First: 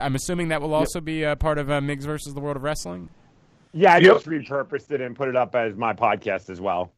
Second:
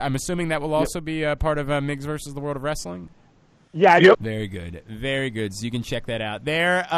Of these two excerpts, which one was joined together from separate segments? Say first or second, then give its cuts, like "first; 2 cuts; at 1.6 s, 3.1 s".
second; 1 cut; at 4.1 s